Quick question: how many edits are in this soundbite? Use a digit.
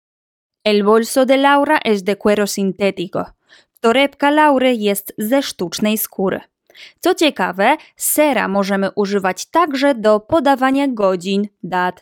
0